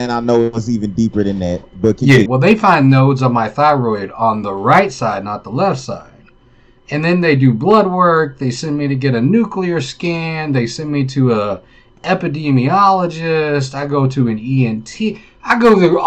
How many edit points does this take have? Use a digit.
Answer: 1